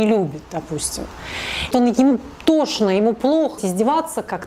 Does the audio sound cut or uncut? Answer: cut